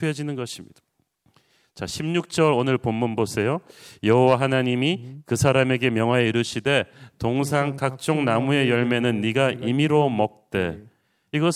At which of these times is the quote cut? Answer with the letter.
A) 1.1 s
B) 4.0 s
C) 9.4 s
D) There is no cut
D